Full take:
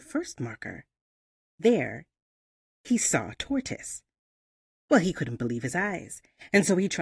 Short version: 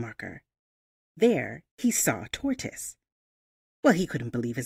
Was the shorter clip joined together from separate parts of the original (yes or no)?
yes